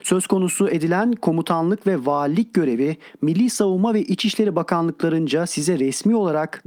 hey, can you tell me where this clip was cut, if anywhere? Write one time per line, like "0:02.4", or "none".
none